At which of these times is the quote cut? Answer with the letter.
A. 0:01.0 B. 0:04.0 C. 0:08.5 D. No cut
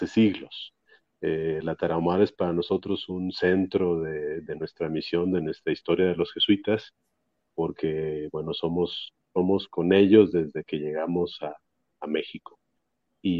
D